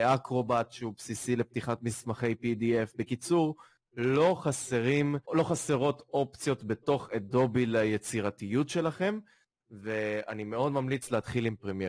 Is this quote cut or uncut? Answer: cut